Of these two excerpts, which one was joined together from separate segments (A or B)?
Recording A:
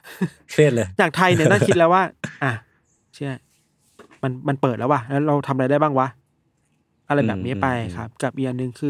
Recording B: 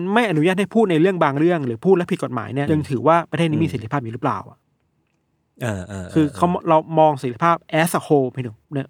B